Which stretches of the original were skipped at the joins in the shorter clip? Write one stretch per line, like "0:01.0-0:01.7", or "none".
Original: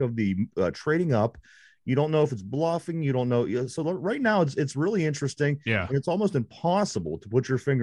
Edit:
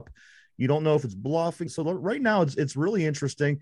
0:02.9-0:03.7